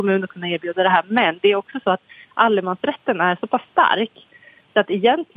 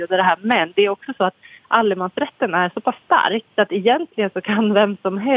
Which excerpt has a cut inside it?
second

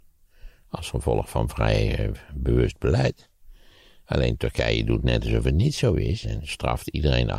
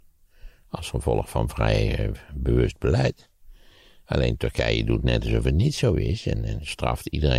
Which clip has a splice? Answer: first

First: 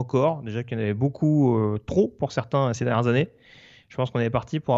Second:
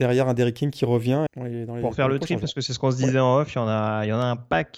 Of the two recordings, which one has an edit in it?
second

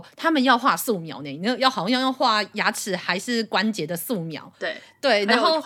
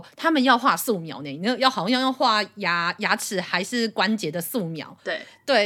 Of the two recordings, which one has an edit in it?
first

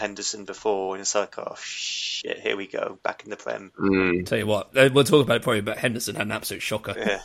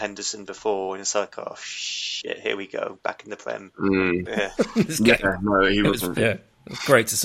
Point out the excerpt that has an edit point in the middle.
second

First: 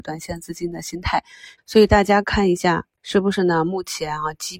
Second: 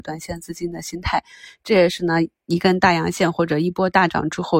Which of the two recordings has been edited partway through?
first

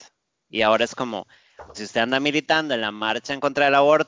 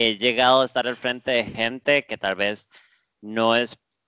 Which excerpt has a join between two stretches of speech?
first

